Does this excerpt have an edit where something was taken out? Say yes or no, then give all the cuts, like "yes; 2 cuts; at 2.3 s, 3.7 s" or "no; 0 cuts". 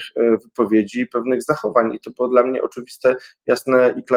no; 0 cuts